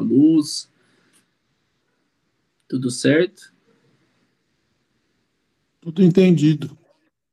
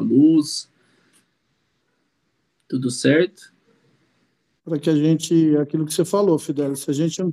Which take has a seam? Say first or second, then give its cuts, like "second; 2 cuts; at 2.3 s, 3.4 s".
second; 1 cut; at 4.6 s